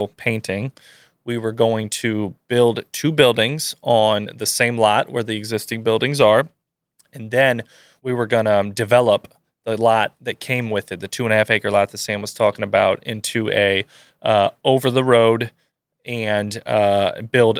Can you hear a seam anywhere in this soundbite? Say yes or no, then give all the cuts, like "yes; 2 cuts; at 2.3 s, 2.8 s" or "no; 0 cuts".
no; 0 cuts